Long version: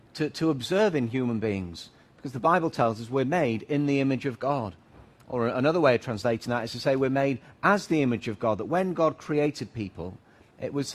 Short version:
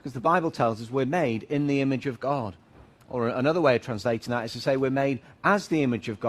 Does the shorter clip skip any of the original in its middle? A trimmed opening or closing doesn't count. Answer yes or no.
no